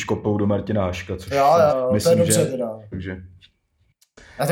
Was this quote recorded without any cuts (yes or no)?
no